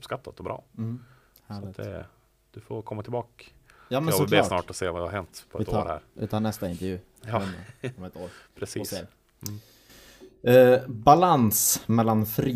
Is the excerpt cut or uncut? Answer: uncut